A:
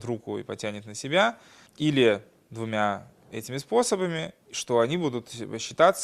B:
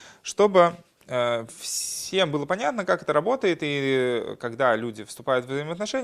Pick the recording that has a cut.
A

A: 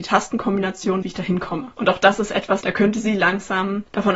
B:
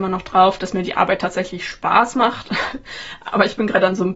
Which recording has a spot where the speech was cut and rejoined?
A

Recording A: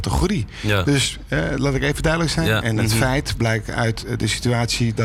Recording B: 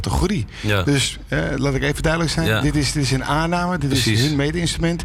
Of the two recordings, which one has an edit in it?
A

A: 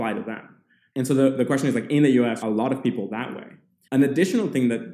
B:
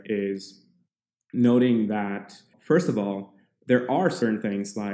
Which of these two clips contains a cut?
A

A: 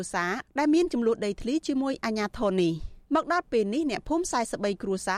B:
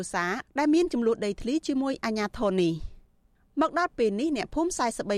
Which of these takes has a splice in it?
A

